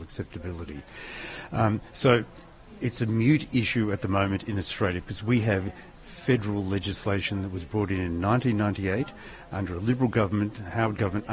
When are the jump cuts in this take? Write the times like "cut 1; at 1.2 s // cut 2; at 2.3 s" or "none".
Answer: none